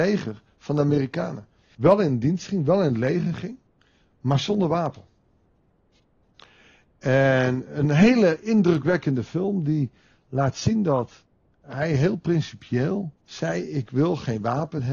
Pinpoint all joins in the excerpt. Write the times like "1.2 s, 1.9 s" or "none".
1.7 s, 13.2 s